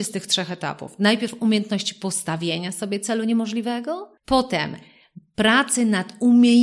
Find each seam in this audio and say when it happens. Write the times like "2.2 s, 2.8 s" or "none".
4.2 s